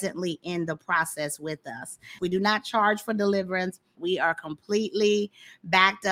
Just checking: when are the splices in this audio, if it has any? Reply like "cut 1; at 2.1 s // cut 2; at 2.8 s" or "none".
cut 1; at 2.2 s // cut 2; at 4.0 s